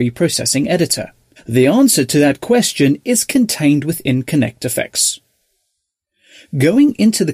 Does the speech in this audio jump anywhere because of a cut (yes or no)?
yes